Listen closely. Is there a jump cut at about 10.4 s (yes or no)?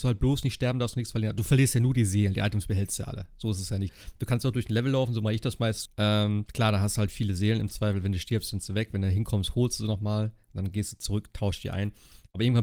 no